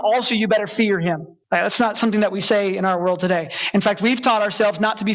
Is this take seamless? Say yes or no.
no